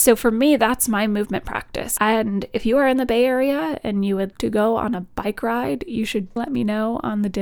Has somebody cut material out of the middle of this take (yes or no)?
yes